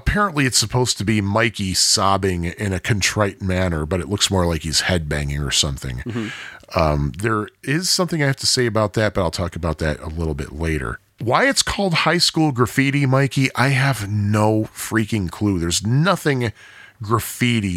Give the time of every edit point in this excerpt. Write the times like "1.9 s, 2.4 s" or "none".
11.1 s